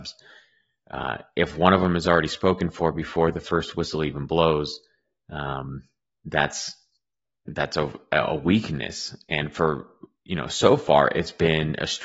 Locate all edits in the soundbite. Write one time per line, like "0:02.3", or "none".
0:06.1

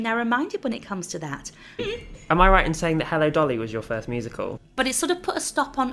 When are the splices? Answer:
0:01.8
0:04.6

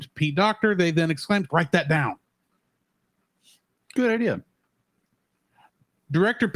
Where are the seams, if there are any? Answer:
0:01.5

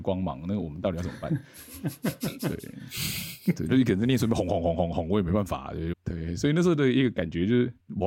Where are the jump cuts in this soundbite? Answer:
0:03.7
0:05.9

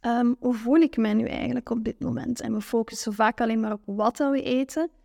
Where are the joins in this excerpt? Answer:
0:02.4

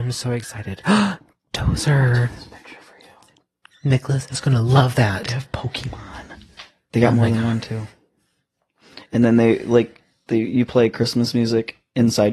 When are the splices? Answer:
none

